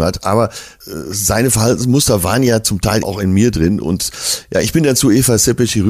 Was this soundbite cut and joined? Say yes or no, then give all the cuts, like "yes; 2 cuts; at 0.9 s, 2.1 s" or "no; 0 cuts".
yes; 1 cut; at 3.0 s